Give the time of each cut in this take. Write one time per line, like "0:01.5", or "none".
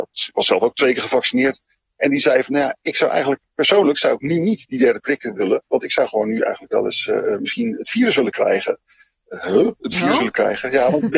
0:07.8

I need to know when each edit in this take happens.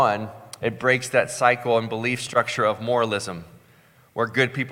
none

